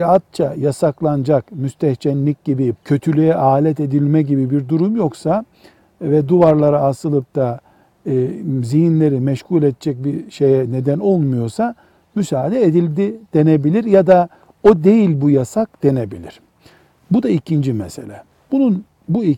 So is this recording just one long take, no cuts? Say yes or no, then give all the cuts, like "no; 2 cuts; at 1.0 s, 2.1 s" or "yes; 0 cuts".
no; 1 cut; at 2.8 s